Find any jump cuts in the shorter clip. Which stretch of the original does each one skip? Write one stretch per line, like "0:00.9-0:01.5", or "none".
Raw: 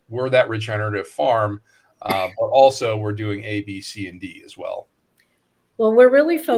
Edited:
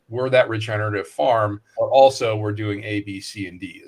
0:01.7-0:02.4